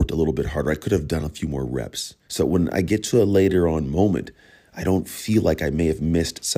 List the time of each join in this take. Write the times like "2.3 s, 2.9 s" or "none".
2.3 s